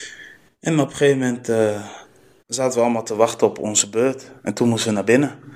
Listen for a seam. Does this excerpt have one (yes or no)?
yes